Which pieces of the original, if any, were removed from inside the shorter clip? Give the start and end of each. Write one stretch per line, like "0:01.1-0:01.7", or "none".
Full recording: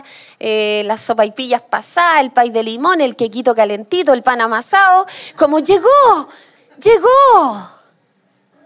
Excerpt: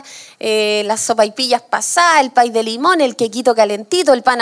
none